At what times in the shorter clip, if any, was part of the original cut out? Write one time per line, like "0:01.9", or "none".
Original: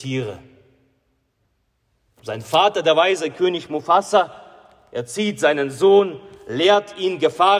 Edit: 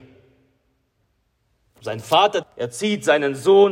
0:02.4